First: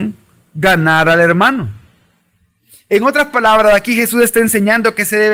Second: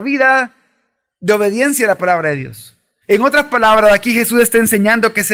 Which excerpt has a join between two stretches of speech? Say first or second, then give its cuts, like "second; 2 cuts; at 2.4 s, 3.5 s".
second; 1 cut; at 3.0 s